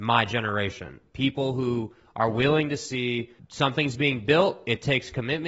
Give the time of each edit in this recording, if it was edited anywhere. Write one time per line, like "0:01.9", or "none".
0:03.4